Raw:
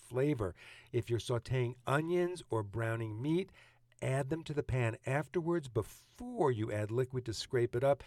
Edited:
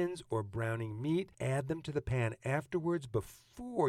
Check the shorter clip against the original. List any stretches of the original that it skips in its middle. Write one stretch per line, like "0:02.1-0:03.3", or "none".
0:03.5-0:03.9